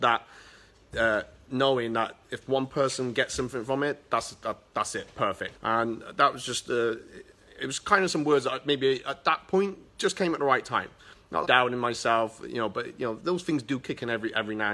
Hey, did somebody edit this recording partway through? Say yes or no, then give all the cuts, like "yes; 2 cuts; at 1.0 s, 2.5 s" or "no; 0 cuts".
yes; 3 cuts; at 5.5 s, 9.9 s, 11.4 s